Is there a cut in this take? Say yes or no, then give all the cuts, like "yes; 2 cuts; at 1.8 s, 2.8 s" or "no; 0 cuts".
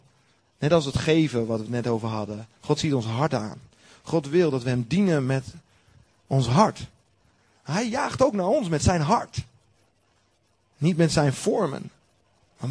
no; 0 cuts